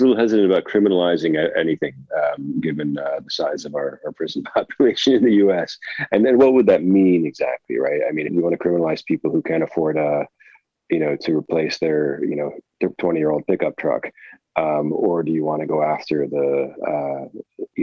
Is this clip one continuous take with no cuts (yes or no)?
no